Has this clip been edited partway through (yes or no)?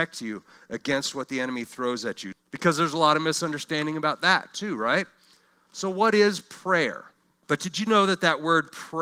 yes